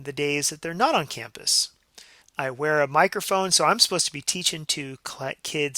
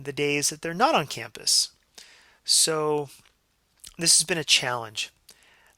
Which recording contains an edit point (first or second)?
first